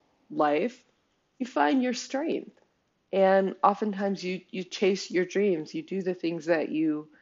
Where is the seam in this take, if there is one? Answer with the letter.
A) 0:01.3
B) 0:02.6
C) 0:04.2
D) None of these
D